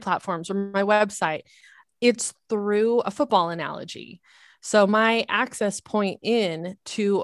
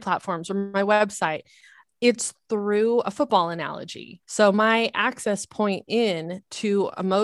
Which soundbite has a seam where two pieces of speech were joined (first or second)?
second